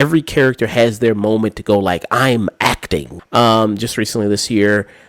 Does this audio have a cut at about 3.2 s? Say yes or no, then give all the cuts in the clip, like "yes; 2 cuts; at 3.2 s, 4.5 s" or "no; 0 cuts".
yes; 1 cut; at 3.2 s